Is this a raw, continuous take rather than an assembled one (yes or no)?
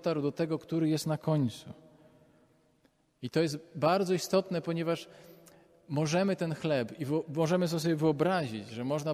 yes